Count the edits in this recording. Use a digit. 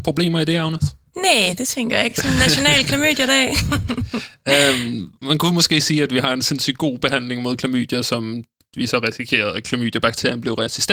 0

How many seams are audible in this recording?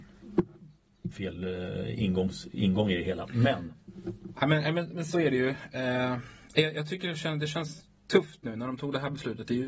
1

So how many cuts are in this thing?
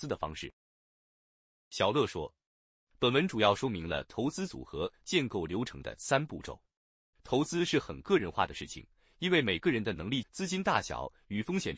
2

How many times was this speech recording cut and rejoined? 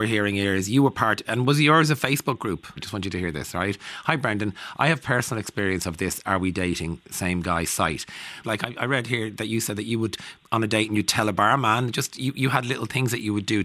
2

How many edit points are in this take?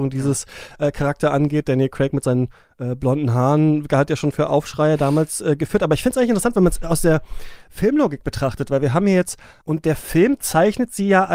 1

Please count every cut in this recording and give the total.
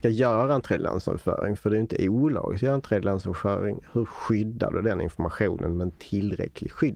0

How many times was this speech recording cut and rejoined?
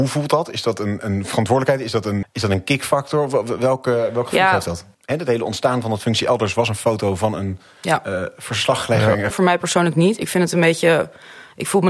3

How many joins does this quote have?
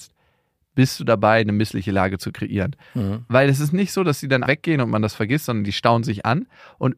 1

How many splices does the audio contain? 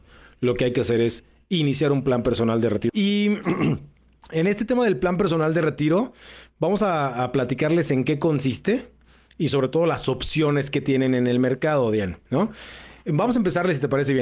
1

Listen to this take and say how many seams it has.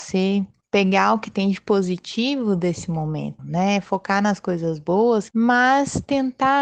2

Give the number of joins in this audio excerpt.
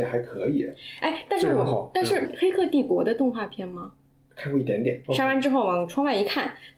2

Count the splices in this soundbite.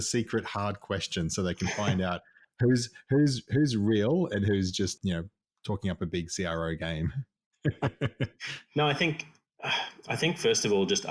1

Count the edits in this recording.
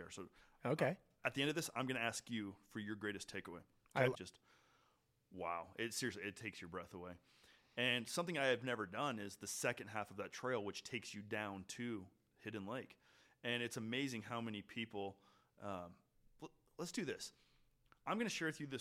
1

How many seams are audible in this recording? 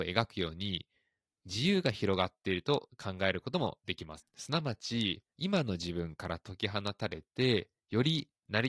2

